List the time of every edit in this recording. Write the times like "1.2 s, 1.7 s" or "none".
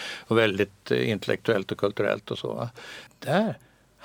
3.1 s

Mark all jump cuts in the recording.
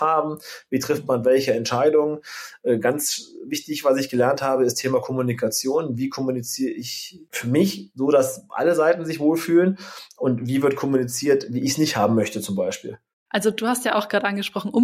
13.3 s

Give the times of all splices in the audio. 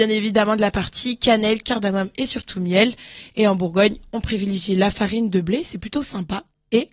1.6 s

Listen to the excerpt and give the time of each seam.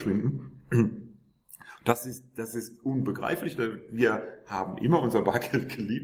none

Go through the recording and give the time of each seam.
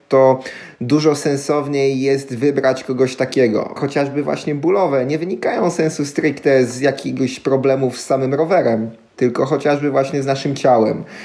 3.8 s

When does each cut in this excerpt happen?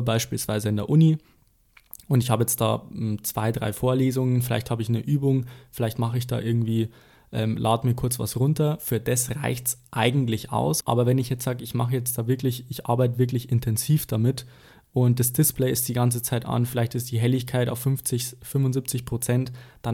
10.8 s

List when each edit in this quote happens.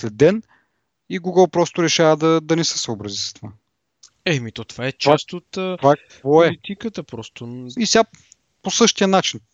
7.8 s

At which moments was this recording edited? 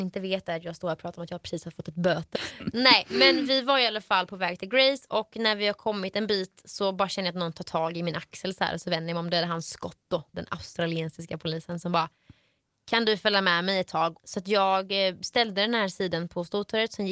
2.4 s, 10.3 s, 14.2 s

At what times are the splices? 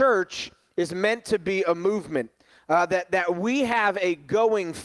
none

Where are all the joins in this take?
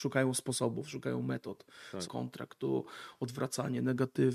2.0 s

